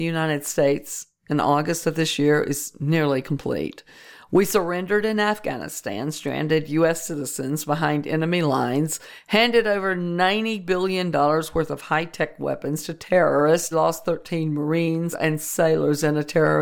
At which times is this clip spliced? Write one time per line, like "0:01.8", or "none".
0:13.7
0:15.1